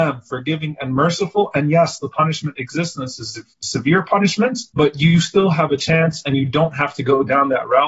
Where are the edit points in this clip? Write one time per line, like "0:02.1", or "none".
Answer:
0:04.7